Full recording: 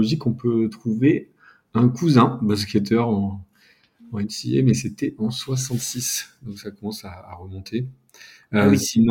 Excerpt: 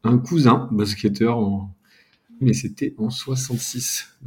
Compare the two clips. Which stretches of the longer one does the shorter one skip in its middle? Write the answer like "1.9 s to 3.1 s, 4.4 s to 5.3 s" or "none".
4.1 s to 4.6 s